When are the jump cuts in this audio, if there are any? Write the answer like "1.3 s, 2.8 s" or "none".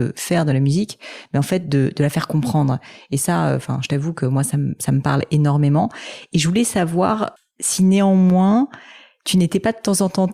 none